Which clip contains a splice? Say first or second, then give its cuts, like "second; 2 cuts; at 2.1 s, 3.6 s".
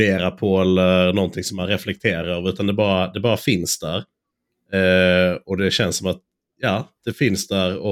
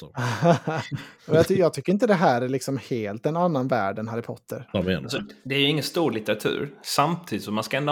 second; 1 cut; at 4.7 s